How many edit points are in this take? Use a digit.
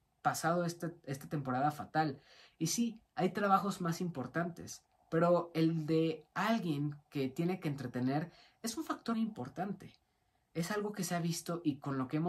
1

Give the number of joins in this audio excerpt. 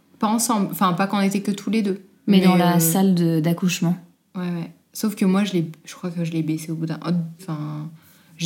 1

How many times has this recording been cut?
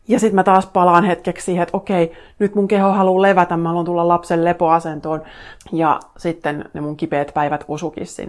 1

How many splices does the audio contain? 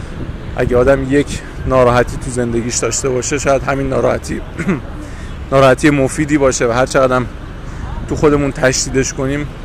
1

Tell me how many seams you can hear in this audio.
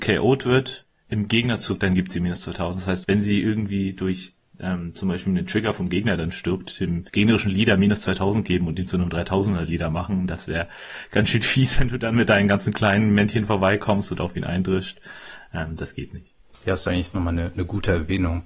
2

